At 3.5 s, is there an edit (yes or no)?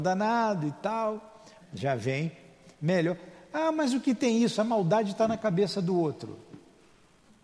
no